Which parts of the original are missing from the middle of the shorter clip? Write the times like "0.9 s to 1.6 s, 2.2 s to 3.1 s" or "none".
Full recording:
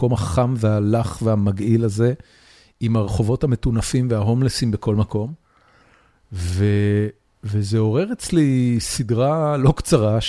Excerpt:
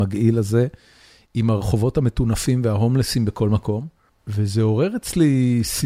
5.6 s to 7.3 s